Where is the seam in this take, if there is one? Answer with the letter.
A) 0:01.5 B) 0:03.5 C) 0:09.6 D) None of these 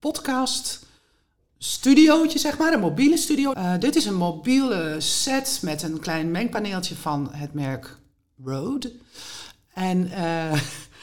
B